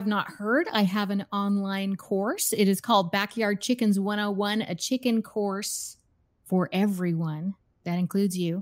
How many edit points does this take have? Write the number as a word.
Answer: zero